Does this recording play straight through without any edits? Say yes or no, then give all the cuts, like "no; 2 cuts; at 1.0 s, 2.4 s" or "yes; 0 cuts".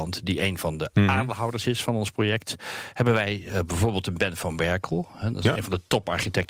yes; 0 cuts